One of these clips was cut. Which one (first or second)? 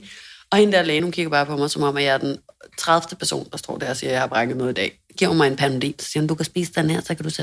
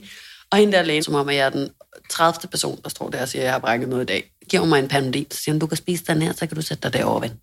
second